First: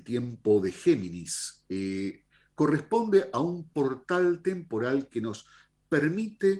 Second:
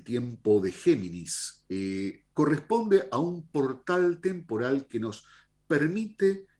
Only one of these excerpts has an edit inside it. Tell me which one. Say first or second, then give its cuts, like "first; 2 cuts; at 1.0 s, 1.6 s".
second; 1 cut; at 2.3 s